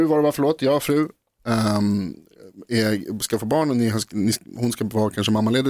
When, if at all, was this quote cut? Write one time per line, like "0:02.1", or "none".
none